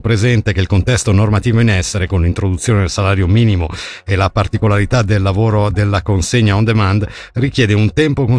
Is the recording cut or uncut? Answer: uncut